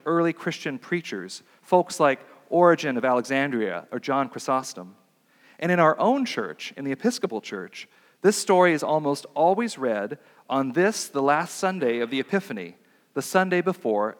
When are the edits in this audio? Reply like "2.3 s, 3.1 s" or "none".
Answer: none